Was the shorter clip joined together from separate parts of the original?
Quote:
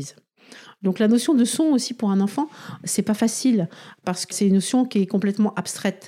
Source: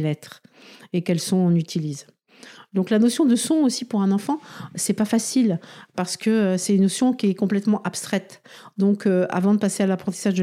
yes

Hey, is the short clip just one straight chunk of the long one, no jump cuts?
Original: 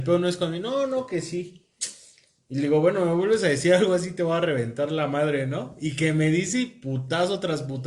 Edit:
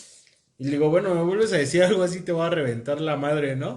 yes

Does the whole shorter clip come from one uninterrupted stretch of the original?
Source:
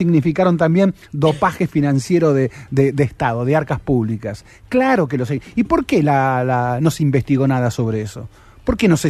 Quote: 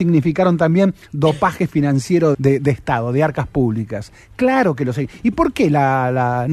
no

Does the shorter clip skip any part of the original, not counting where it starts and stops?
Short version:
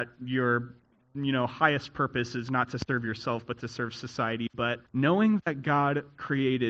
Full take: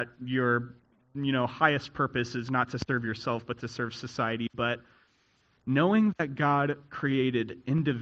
yes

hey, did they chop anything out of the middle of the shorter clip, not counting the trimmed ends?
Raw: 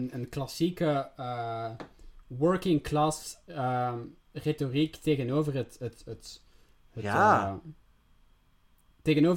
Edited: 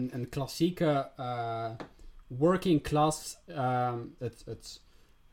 yes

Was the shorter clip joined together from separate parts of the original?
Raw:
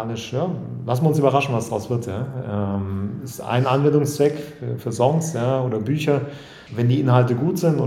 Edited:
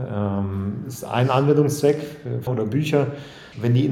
yes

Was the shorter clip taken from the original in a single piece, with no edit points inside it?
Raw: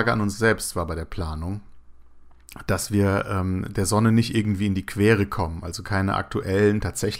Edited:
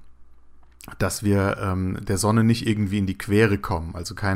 yes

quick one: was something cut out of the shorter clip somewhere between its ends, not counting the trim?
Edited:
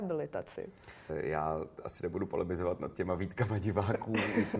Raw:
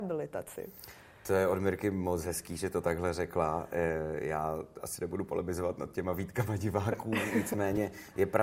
yes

